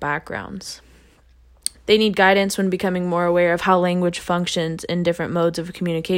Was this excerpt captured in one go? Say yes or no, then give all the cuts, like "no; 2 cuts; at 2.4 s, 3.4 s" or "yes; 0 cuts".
no; 1 cut; at 1.7 s